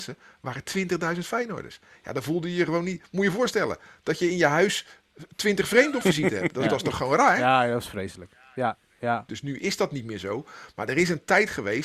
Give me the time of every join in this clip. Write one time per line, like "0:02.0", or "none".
0:09.3